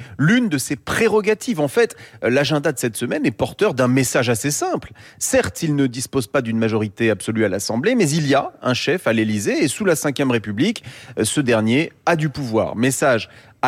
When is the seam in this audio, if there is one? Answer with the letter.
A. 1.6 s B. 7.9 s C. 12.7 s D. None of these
D